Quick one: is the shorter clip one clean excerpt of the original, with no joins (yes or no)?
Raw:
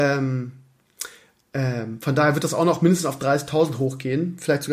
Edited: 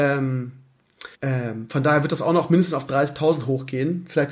no